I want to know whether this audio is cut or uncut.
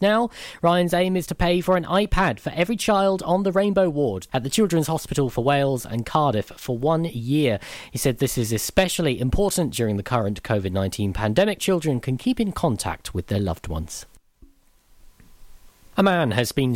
cut